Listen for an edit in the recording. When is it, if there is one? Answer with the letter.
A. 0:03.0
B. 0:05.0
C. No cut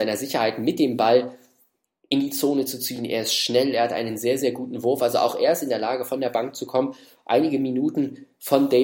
C